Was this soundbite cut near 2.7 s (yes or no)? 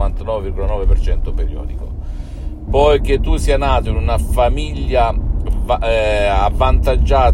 yes